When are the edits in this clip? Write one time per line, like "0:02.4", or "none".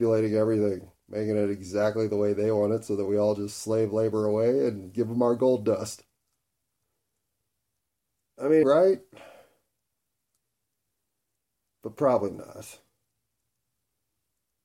0:08.6